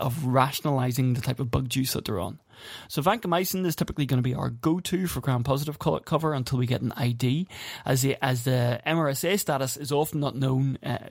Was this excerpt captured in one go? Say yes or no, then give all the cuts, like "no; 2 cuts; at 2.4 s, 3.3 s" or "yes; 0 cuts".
yes; 0 cuts